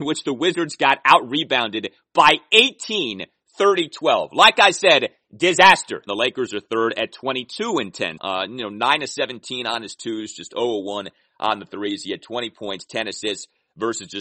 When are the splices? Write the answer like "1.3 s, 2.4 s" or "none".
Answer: 6.1 s, 8.2 s

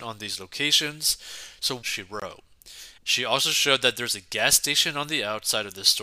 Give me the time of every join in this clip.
1.8 s, 3.0 s

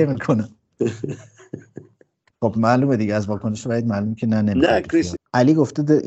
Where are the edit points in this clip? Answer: 5.2 s

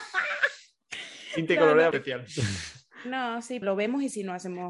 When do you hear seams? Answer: 1.9 s, 3.6 s

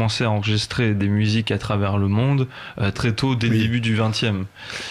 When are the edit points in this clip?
2.9 s

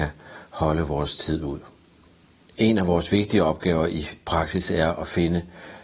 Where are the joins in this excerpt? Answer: none

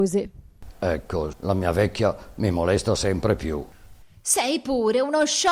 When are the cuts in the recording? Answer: 1.3 s, 4.0 s

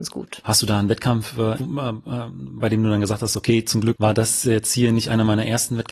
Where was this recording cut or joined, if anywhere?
1.6 s

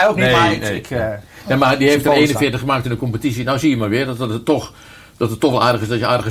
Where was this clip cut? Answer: none

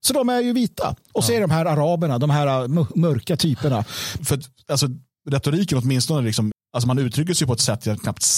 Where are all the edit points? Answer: 4.2 s, 6.5 s

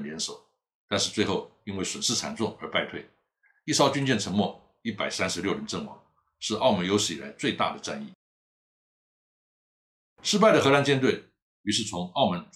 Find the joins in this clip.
none

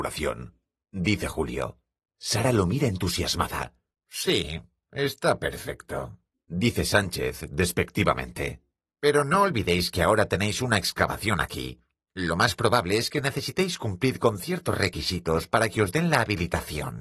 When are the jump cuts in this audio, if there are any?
3.9 s

